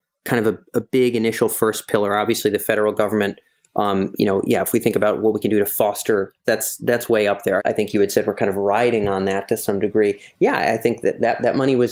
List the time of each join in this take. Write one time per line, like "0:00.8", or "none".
0:06.4
0:07.6